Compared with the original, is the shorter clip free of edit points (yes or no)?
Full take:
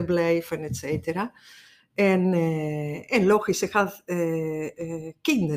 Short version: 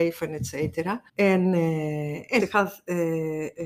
no